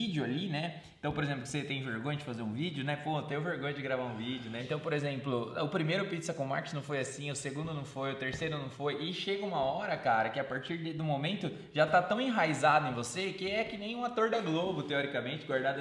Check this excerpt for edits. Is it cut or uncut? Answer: cut